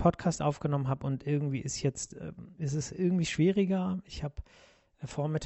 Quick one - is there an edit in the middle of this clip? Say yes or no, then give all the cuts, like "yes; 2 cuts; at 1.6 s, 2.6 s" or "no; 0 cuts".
no; 0 cuts